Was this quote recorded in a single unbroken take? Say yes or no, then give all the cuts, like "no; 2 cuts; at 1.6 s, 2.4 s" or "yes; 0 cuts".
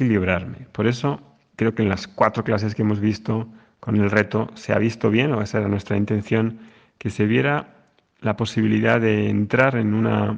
no; 1 cut; at 1.5 s